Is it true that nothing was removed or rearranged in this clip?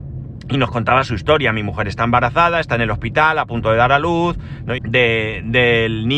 no; 1 cut; at 4.8 s

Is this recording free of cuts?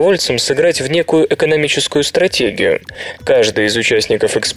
yes; 0 cuts

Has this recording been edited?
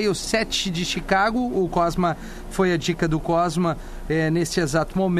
no; 0 cuts

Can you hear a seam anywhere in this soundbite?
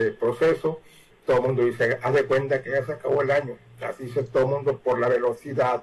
yes; 1 cut; at 1.1 s

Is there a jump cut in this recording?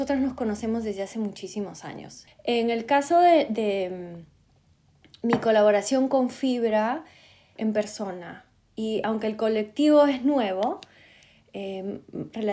yes; 2 cuts; at 2.3 s, 7.6 s

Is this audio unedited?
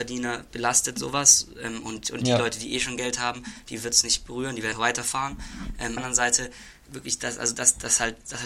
no; 2 cuts; at 4.7 s, 6.0 s

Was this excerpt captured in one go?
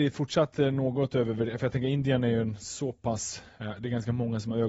yes; 0 cuts

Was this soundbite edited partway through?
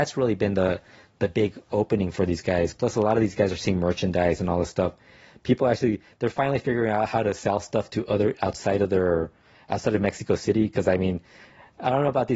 no; 0 cuts

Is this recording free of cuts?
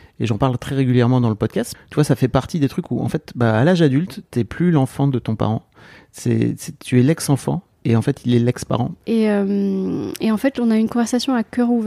no; 2 cuts; at 1.7 s, 9.0 s

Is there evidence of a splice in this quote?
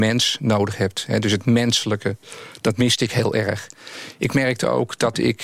no; 0 cuts

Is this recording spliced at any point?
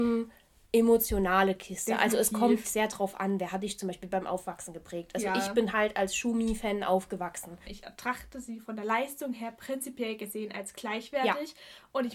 yes; 2 cuts; at 2.6 s, 7.6 s

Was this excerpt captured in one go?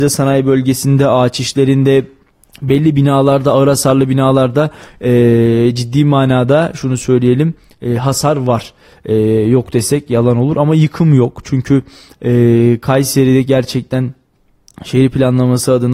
yes; 0 cuts

